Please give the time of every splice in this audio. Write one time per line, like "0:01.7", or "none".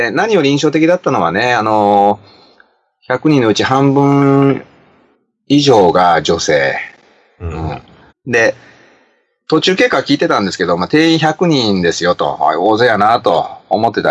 0:08.1